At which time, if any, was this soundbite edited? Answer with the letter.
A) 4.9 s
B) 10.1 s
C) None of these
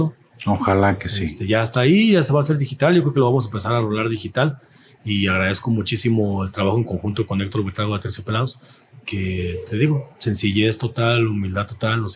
C